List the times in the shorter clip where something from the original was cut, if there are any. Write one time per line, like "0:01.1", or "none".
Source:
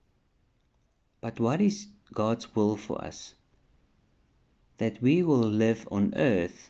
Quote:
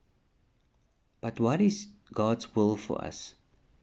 none